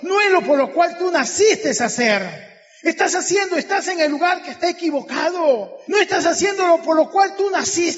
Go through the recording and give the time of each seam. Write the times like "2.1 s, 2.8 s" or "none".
5.9 s